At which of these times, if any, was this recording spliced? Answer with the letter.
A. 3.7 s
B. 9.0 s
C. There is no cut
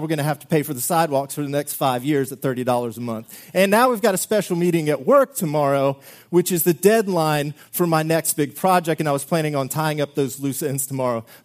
C